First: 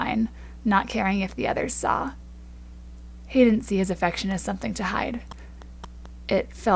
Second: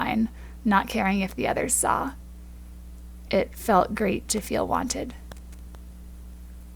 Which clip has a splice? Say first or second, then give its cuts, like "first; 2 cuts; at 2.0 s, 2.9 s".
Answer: second; 1 cut; at 3.3 s